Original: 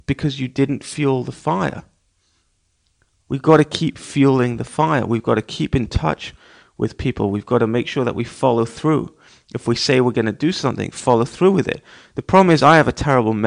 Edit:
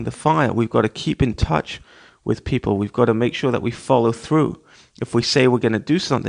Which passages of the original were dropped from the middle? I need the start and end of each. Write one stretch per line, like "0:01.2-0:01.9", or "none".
none